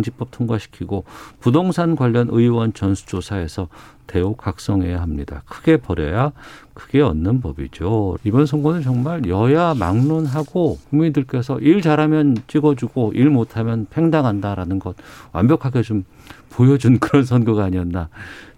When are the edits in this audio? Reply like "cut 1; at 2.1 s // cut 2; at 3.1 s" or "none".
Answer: cut 1; at 8.2 s // cut 2; at 10.8 s